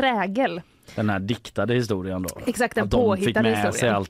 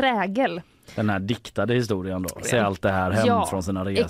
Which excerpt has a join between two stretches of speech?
second; 1 cut; at 2.4 s

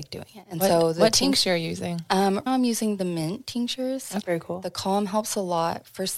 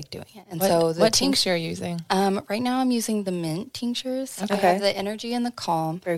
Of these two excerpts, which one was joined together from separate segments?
first; 2 cuts; at 2.5 s, 4.2 s

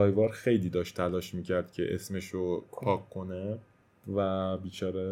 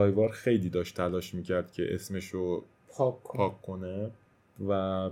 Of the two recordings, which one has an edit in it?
first; 1 cut; at 2.7 s

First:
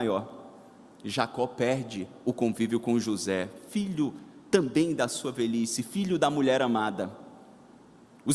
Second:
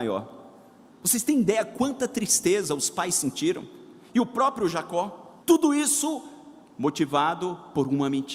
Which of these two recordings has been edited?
second; 2 cuts; at 0.9 s, 5.4 s

